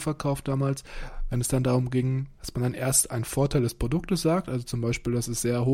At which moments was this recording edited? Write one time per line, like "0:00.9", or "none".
0:02.4